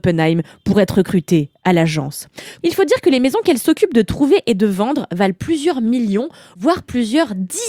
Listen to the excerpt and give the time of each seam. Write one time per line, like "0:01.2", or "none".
0:02.6